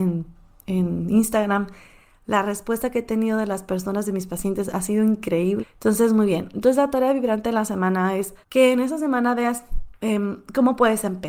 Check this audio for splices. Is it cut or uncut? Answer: cut